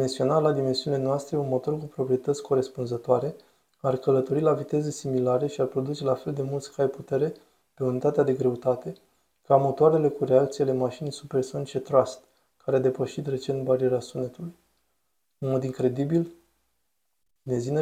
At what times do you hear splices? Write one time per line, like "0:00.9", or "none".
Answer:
none